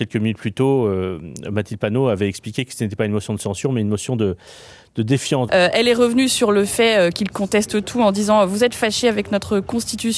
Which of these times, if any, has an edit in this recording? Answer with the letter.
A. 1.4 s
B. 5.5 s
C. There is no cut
B